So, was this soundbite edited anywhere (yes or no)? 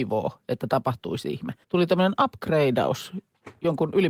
yes